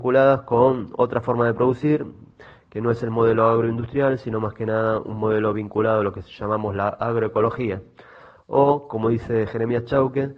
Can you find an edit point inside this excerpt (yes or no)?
no